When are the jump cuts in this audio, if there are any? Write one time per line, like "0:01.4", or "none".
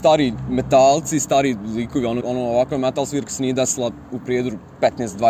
0:02.2